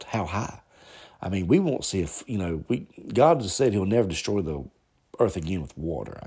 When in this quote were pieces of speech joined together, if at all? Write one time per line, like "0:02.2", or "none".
none